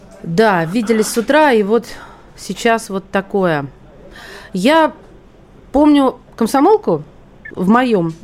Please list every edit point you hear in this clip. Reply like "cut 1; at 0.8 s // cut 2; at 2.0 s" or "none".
none